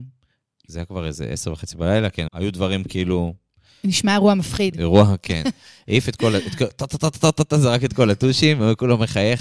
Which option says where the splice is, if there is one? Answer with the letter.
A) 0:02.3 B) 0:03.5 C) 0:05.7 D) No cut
A